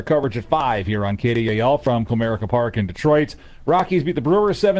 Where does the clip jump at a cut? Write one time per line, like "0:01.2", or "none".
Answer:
none